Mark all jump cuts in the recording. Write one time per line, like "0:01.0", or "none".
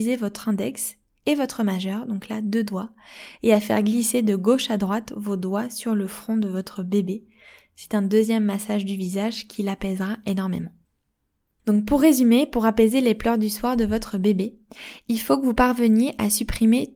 none

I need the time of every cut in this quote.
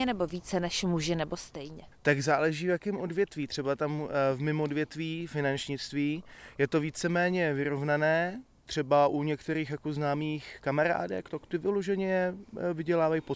none

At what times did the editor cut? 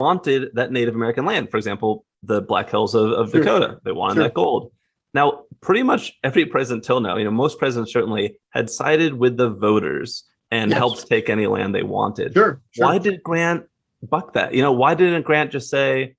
none

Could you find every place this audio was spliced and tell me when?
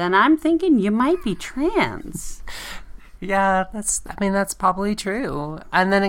none

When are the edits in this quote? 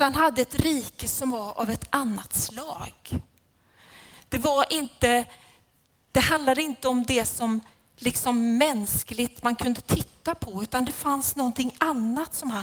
none

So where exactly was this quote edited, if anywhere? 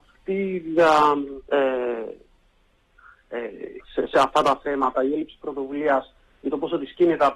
0:01.5
0:03.8

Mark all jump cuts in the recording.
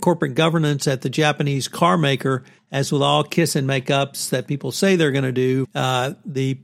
0:02.6
0:05.6

